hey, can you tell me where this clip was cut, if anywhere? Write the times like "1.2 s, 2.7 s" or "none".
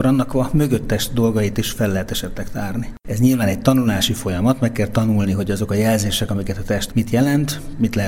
3.0 s, 6.9 s